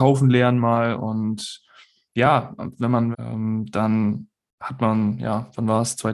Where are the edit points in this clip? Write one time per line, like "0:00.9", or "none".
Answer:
0:03.1

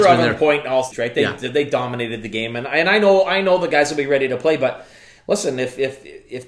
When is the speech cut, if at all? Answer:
0:00.9

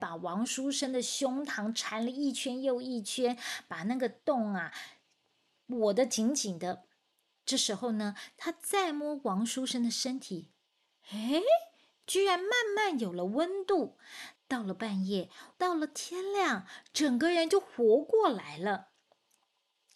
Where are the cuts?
0:14.4
0:15.5

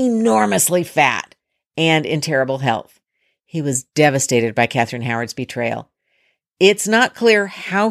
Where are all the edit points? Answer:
none

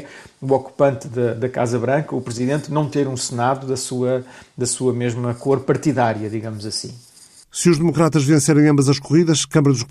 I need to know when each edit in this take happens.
none

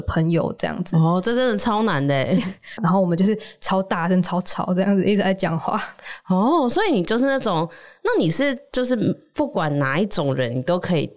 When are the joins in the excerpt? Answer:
0:02.8

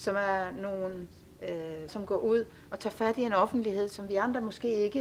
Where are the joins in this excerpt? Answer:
0:01.9

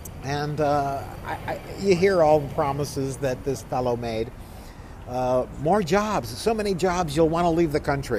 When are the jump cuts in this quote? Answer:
none

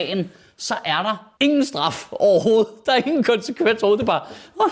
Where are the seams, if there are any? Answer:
0:01.4

